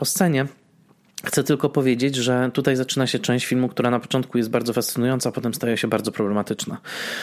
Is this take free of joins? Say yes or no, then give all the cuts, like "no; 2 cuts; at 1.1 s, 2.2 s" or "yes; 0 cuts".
yes; 0 cuts